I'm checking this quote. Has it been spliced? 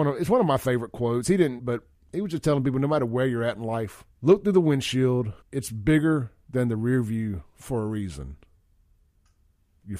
yes; 3 cuts; at 1.6 s, 4.1 s, 5.4 s

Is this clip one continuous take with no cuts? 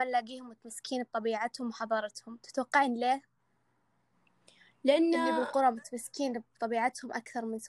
yes; 0 cuts

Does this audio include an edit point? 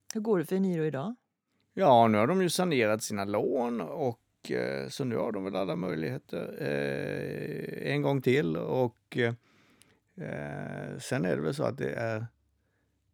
no; 0 cuts

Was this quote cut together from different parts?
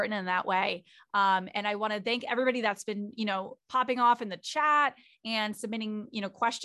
no; 0 cuts

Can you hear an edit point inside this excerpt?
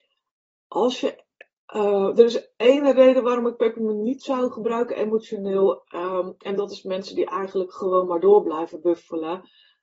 no; 0 cuts

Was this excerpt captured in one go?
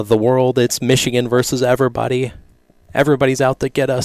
yes; 0 cuts

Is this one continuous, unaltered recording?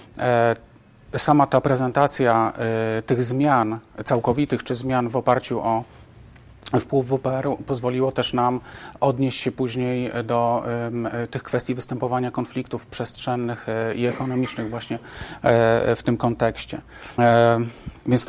no; 1 cut; at 17.2 s

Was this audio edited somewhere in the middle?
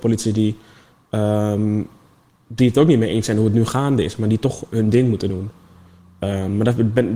no; 0 cuts

